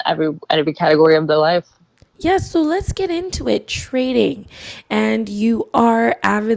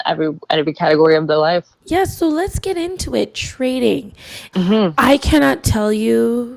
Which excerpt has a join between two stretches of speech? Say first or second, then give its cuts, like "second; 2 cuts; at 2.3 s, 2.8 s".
second; 2 cuts; at 1.7 s, 4.5 s